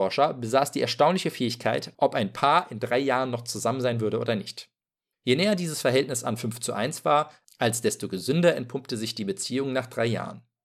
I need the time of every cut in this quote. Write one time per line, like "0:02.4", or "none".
0:01.9
0:05.1